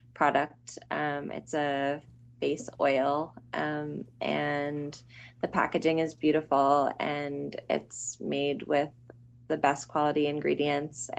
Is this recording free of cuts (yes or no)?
yes